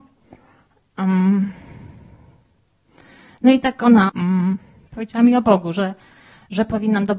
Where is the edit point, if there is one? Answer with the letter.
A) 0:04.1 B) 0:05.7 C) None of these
A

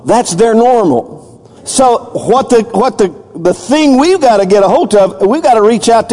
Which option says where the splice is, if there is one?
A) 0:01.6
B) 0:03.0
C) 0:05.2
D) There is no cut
A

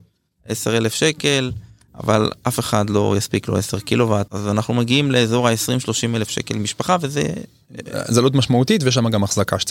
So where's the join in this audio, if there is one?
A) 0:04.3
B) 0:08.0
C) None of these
A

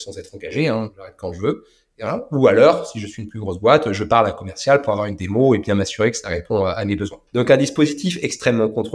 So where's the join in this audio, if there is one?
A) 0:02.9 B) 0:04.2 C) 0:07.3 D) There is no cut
C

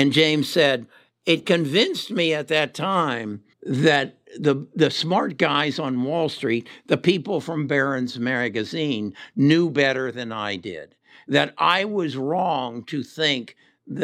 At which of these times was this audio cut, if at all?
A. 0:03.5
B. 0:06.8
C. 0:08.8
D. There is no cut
A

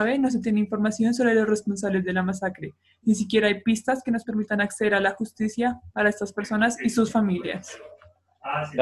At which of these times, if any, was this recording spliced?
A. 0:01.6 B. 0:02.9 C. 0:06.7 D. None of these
D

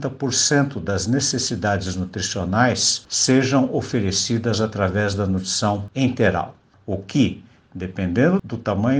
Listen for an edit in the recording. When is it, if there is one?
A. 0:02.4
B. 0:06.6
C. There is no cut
C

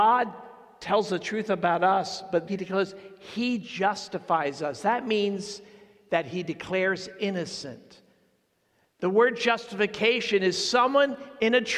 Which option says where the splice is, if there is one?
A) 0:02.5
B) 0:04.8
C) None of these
A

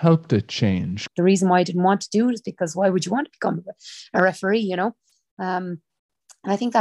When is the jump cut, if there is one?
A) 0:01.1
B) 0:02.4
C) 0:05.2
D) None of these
A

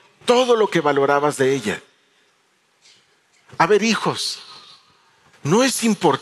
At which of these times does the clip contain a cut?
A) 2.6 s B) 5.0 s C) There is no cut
C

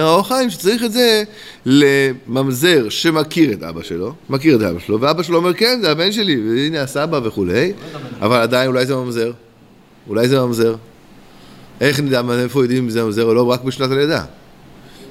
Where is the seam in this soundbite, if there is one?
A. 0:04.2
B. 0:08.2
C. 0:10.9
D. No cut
A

